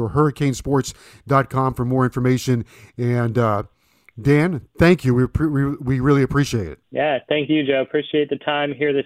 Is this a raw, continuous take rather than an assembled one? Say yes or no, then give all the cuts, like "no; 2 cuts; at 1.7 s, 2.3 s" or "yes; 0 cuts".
no; 1 cut; at 6.8 s